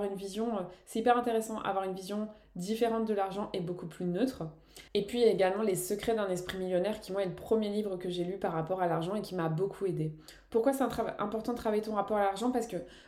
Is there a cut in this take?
no; 0 cuts

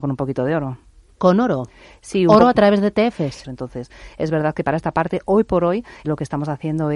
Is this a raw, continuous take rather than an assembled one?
no; 2 cuts; at 3.4 s, 6.0 s

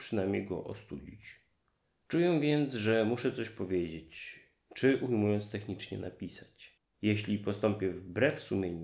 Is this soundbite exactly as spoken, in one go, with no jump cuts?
no; 1 cut; at 6.9 s

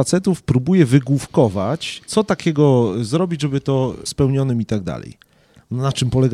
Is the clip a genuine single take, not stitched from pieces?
no; 2 cuts; at 2.0 s, 4.1 s

